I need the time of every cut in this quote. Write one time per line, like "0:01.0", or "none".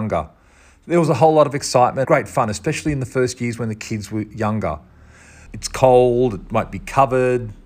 0:02.0
0:05.5